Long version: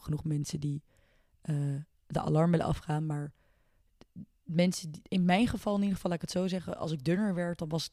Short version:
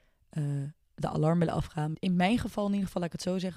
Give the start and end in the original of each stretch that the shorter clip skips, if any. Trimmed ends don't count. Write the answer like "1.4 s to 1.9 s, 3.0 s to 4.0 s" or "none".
3.1 s to 5.0 s